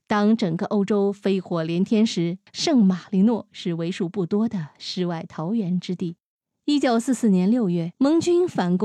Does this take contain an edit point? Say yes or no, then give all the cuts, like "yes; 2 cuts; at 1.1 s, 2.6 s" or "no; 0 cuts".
no; 0 cuts